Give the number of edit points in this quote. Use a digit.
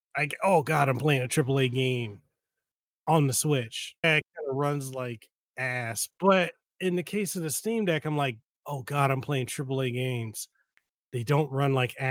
0